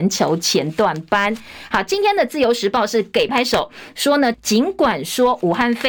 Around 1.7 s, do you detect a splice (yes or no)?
no